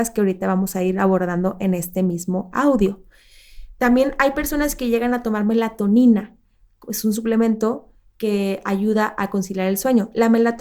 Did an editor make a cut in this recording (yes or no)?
no